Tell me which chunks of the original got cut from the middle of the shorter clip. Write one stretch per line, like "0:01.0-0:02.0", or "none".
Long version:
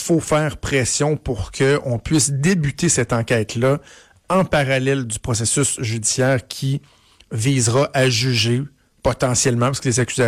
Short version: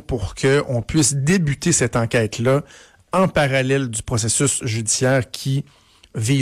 none